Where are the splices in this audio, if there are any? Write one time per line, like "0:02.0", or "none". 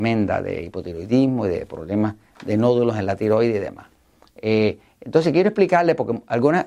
none